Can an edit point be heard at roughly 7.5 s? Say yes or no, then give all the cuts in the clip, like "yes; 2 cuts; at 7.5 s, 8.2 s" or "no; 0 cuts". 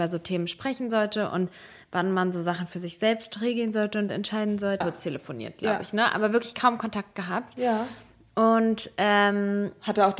no; 1 cut; at 4.8 s